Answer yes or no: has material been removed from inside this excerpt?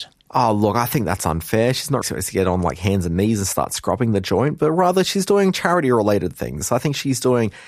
yes